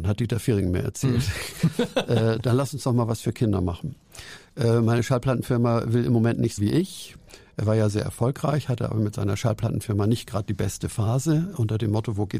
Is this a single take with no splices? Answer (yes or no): no